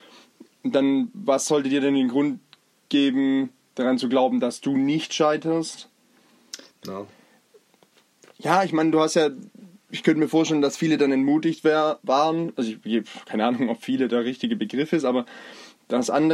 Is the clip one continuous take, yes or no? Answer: no